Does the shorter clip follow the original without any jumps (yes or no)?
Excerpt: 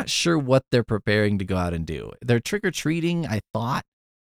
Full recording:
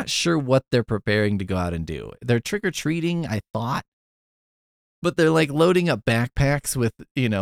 yes